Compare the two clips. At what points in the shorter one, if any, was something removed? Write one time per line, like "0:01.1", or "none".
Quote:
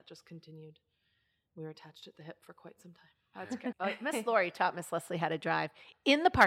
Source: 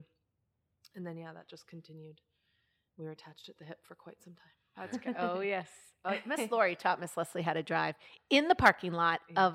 0:03.7